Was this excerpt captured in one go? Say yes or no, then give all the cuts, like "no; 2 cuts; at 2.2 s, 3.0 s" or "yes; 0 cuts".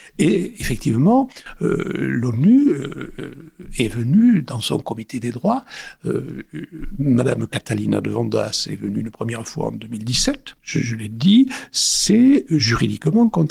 no; 1 cut; at 10.6 s